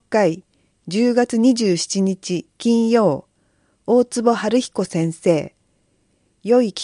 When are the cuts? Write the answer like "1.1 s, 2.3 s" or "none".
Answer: none